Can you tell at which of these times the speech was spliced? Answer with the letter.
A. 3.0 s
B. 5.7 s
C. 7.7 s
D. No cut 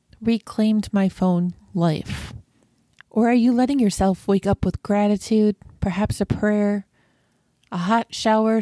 A